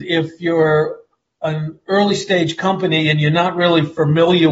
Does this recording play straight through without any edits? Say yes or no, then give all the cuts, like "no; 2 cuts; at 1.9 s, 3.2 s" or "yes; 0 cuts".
yes; 0 cuts